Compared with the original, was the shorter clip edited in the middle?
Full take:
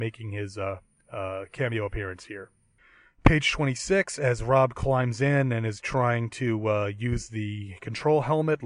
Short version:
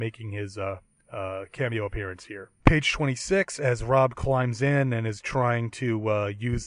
yes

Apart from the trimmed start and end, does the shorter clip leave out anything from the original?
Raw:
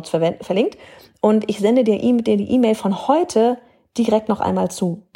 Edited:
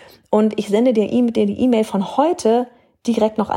no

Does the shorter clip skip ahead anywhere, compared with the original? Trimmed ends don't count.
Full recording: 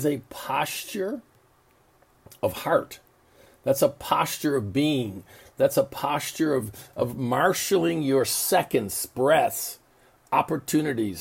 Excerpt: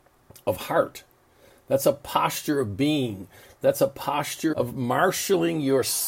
yes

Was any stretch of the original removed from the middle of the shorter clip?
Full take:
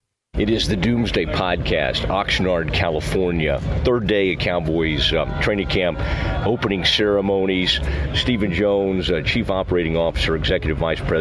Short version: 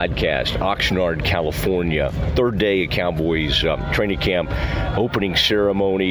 no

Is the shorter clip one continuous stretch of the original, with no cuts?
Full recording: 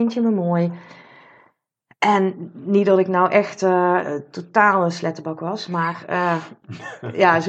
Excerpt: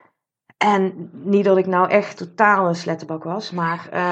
no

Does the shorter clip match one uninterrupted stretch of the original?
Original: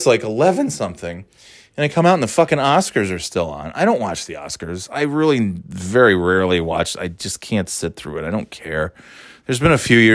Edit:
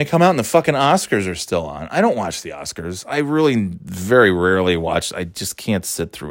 yes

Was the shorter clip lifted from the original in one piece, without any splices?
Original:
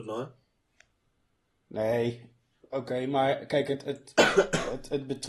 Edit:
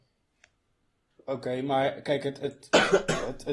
no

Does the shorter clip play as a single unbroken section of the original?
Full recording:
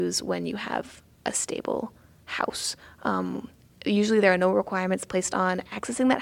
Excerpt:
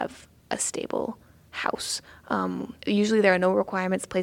no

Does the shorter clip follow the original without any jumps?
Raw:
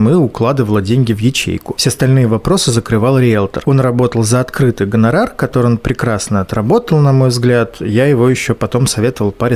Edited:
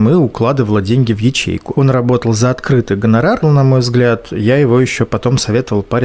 no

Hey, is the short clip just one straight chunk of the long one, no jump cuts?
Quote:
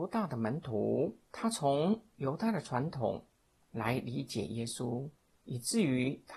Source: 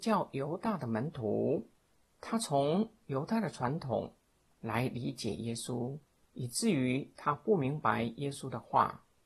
no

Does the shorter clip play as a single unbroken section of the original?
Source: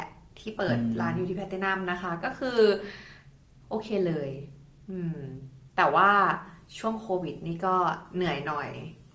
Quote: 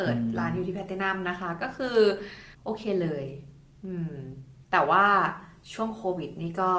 no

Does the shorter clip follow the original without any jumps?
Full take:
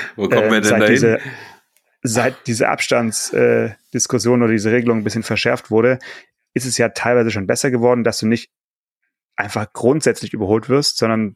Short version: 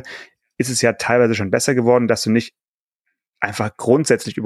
yes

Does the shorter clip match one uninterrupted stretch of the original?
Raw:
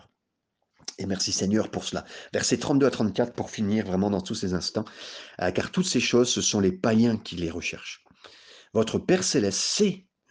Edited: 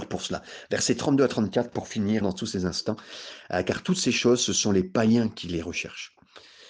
no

